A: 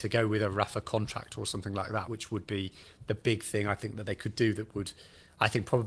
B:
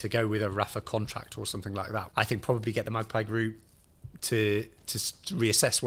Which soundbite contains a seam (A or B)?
B